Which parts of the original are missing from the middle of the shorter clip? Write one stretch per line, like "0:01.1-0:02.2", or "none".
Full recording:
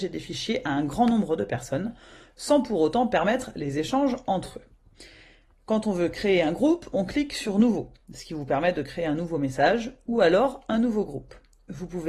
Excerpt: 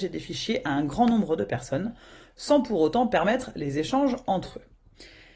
none

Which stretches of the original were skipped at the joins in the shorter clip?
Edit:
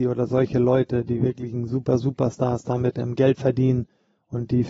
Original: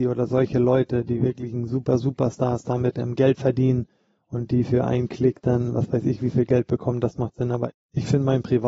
none

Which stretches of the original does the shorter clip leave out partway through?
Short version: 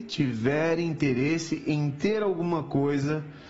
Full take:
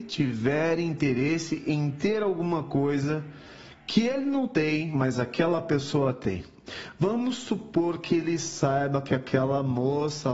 none

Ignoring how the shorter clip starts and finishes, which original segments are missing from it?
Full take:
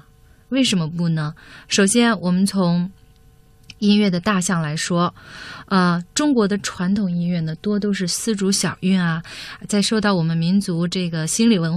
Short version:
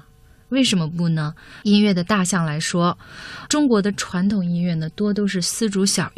0:01.6-0:03.8
0:05.6-0:06.1

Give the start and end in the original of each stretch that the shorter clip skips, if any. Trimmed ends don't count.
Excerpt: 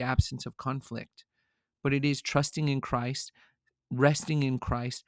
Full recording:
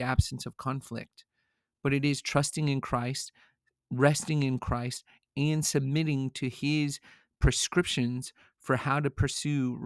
none

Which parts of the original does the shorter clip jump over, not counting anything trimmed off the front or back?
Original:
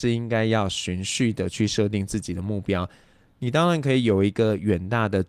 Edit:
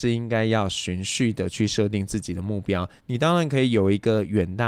0:03.0-0:03.3

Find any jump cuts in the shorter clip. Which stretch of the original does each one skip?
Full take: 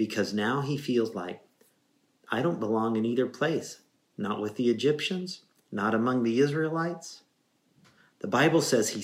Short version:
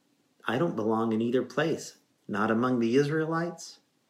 0:04.0-0:05.6

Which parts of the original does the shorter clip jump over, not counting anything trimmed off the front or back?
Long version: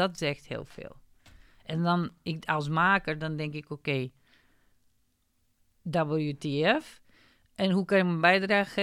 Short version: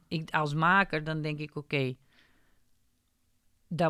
none

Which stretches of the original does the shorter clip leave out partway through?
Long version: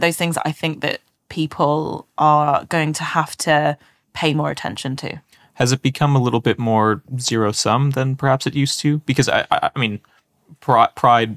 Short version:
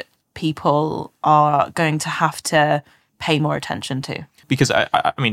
0:05.4-0:09.0

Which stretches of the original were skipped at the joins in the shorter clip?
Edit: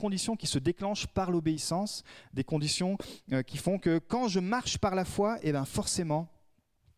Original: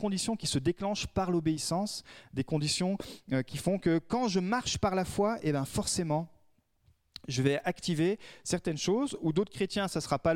none

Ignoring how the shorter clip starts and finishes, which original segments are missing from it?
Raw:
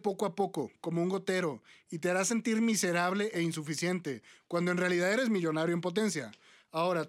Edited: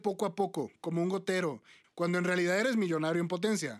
0:01.8-0:04.4

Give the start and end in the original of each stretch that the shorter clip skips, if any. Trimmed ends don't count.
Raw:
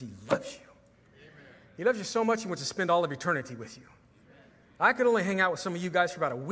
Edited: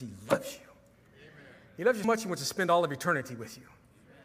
0:02.0-0:02.2

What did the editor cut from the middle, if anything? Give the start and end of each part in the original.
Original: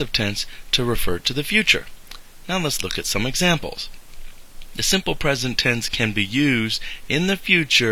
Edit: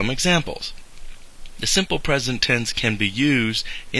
none

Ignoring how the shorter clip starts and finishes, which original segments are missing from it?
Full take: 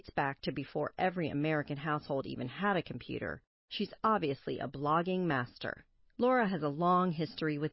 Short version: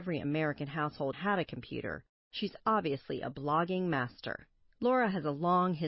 0:02.2-0:02.5

